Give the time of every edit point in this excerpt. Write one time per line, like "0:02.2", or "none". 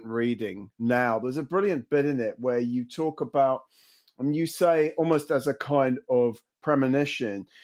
none